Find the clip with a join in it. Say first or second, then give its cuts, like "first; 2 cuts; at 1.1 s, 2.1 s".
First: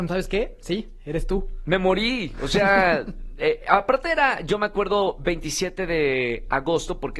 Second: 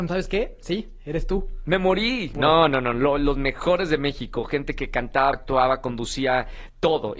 second; 2 cuts; at 2.3 s, 5.3 s